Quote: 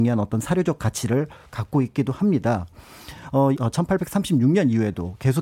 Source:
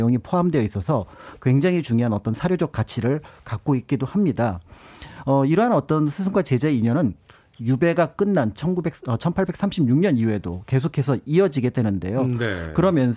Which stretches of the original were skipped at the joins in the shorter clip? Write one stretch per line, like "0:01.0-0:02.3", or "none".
0:05.5-0:09.0